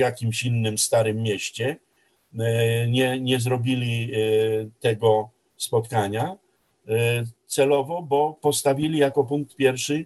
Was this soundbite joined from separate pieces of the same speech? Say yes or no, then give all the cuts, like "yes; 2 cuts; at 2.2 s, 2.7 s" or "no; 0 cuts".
no; 0 cuts